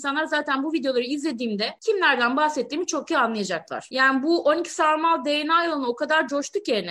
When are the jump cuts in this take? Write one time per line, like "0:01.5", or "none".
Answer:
none

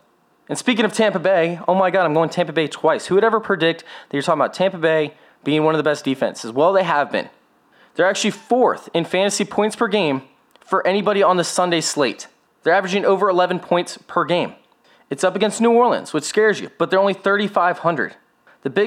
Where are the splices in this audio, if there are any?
none

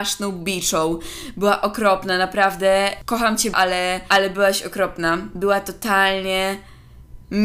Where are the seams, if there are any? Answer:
0:03.5

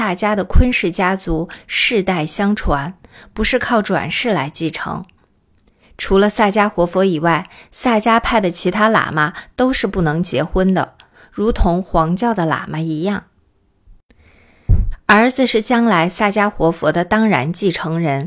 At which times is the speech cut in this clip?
0:05.8
0:14.9

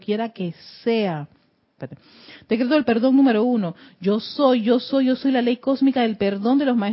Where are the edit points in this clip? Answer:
0:01.8

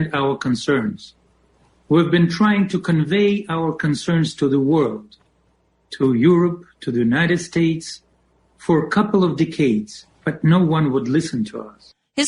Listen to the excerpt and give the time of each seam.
none

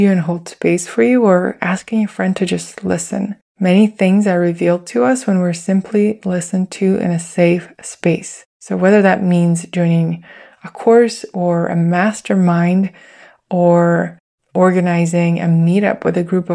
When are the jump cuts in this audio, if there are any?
none

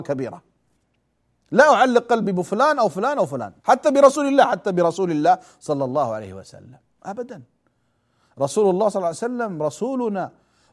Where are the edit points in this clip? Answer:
0:03.6

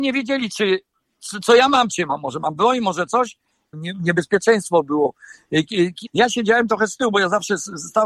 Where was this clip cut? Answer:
0:03.7
0:06.1

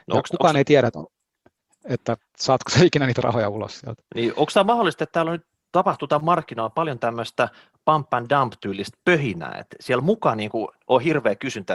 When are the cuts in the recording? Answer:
none

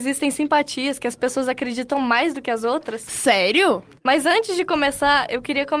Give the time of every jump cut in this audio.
0:04.0

